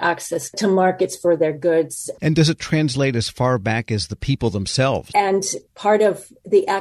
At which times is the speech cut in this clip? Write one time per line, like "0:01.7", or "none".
0:02.2
0:05.1